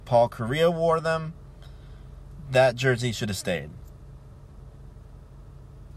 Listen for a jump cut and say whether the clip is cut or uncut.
uncut